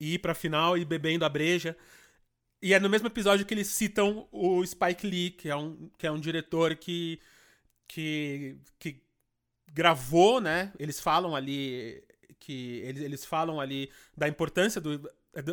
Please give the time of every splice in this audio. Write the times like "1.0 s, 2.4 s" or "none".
none